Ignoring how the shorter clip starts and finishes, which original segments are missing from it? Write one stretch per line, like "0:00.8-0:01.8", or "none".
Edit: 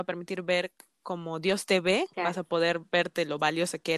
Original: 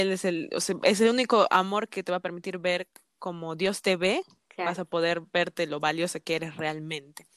0:04.3-0:04.5